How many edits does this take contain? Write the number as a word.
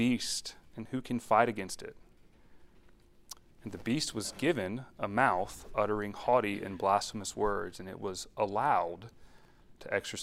zero